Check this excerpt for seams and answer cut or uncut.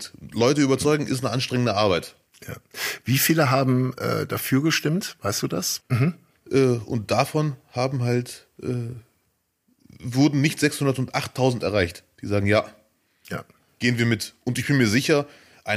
cut